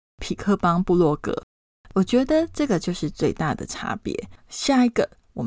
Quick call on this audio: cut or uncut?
cut